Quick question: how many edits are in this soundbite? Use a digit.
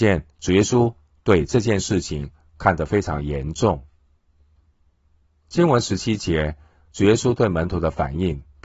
0